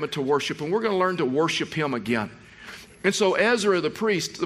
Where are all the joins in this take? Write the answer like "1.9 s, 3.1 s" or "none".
2.9 s